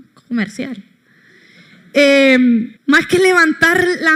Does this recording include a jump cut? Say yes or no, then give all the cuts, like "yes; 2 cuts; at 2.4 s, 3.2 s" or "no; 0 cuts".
yes; 1 cut; at 2.8 s